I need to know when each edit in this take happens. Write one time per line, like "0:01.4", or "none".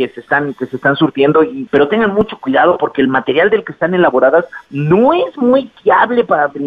0:01.7